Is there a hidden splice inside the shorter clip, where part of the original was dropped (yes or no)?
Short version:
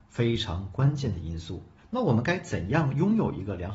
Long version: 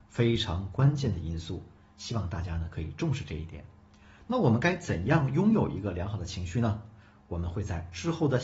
yes